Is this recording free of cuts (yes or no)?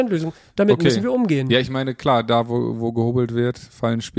yes